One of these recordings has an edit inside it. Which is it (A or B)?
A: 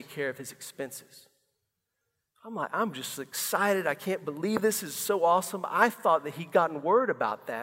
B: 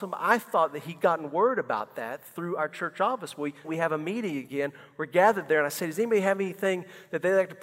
B